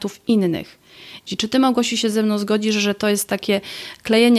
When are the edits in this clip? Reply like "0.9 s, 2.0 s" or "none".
1.3 s